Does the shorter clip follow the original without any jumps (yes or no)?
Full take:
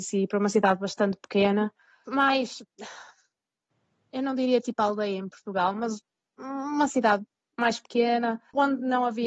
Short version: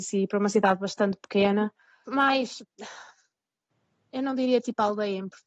yes